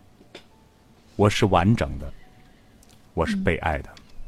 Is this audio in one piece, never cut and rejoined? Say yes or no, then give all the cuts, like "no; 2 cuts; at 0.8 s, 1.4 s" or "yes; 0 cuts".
yes; 0 cuts